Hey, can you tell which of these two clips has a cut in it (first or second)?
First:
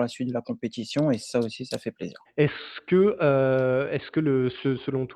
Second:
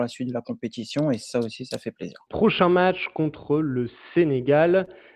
first